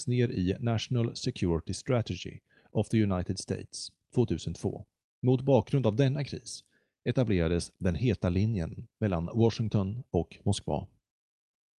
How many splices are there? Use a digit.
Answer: 1